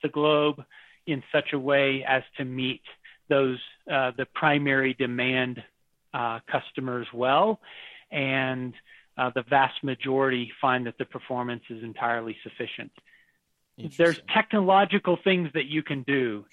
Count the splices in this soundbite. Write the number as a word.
zero